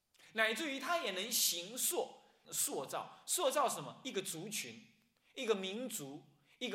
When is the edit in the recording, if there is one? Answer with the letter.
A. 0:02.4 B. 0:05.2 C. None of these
A